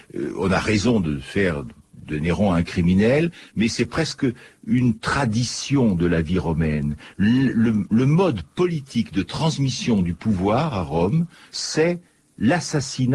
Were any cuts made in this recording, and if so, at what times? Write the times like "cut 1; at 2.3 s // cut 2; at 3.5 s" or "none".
none

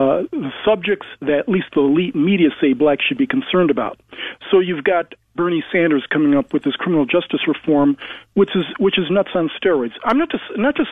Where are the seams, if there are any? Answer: none

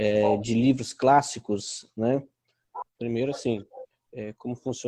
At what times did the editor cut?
cut 1; at 2.8 s

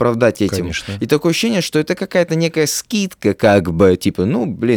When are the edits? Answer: none

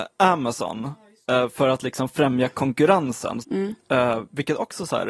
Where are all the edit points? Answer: cut 1; at 3.4 s

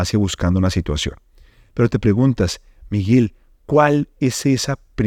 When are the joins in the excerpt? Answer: none

